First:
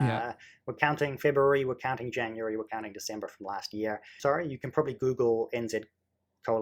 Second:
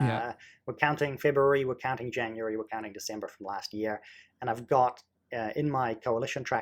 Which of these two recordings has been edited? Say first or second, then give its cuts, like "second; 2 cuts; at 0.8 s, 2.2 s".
first; 1 cut; at 4.2 s